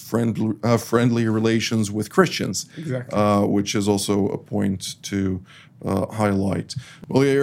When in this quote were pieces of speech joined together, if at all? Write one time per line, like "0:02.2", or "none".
none